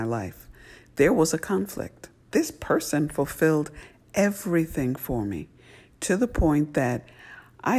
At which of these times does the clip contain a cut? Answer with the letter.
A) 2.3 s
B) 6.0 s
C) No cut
A